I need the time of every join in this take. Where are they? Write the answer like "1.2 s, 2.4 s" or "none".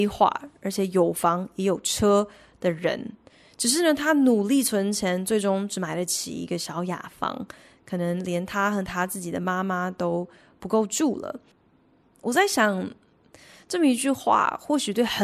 11.5 s